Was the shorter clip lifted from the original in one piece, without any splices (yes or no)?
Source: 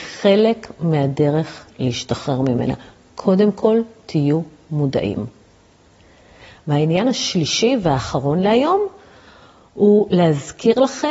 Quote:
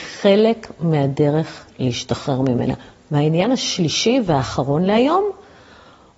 no